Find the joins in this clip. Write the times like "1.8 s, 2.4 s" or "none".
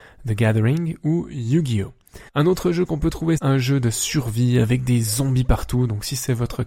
2.3 s, 3.4 s